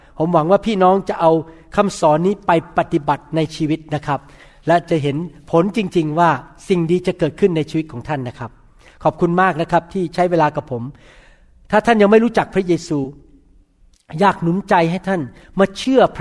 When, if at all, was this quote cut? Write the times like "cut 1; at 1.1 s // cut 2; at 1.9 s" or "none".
none